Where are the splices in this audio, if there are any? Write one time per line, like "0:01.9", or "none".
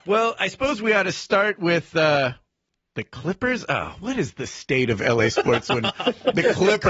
none